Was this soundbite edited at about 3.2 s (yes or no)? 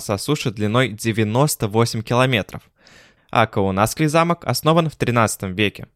yes